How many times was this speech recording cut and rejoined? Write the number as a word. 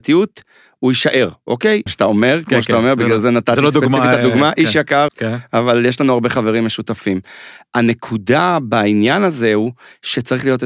two